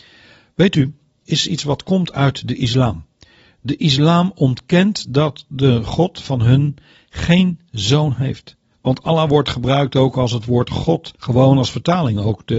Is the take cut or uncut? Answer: cut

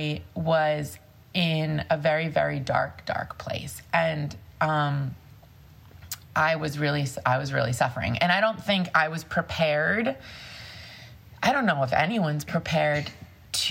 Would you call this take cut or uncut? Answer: uncut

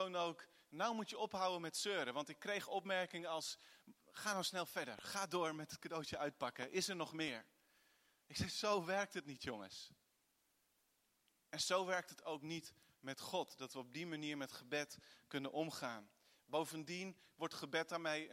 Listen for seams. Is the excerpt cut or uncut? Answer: uncut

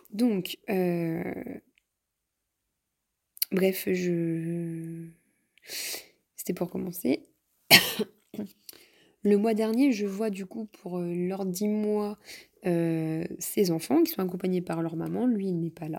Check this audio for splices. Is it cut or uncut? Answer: uncut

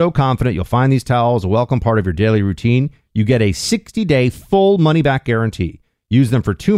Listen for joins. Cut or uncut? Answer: uncut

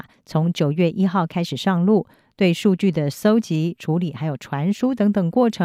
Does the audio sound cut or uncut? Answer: cut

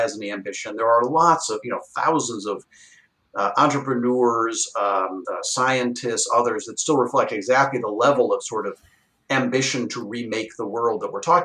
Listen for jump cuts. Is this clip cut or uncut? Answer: cut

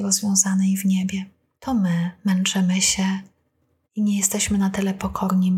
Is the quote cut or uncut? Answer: cut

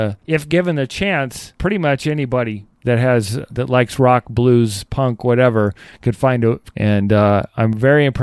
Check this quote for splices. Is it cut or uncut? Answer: cut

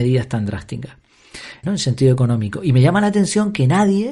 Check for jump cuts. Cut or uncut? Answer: cut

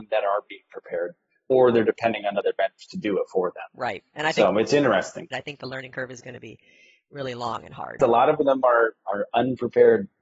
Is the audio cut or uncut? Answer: cut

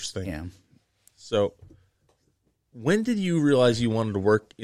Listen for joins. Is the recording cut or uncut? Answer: uncut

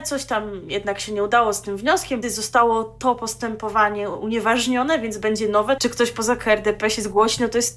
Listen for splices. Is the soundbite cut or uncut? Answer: cut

